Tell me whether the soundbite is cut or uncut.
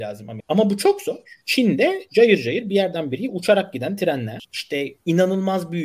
cut